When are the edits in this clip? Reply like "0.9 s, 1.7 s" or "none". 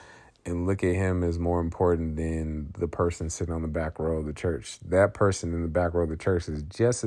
none